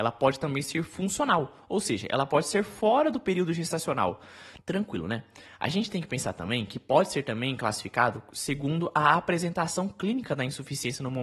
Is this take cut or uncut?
cut